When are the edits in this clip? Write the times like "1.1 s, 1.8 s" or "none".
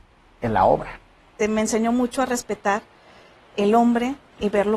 1.4 s